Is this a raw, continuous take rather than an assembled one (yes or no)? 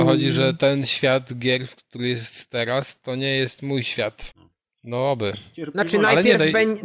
no